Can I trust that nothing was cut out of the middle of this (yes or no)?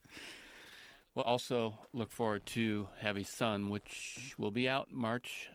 no